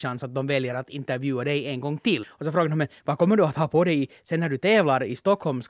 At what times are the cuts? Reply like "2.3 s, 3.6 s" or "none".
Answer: 2.2 s